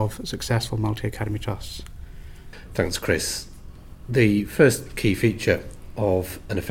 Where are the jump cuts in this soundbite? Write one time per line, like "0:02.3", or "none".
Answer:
none